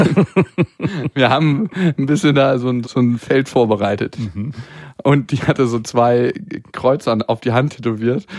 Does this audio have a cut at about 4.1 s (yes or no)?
no